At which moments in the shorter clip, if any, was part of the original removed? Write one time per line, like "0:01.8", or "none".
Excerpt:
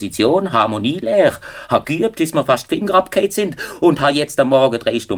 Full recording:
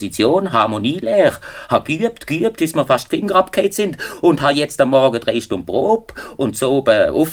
0:01.8